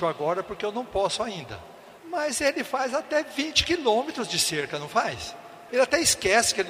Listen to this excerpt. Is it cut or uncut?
cut